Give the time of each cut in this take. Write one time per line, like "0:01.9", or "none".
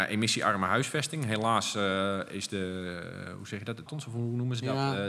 0:03.9